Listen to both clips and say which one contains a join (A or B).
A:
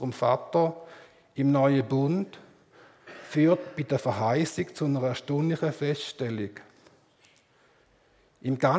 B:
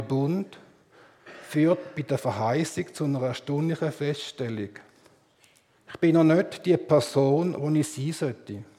B